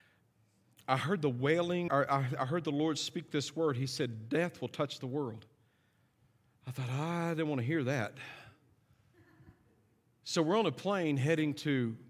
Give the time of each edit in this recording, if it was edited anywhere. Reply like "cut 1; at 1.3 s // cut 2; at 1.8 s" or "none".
cut 1; at 1.9 s